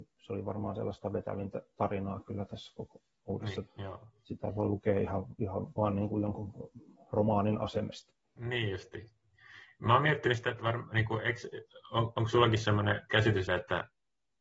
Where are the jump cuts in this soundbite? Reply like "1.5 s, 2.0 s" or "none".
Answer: 3.7 s, 13.5 s